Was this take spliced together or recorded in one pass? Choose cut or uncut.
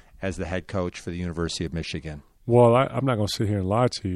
uncut